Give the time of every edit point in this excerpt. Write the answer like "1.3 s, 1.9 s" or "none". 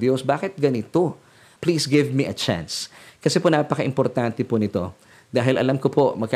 1.6 s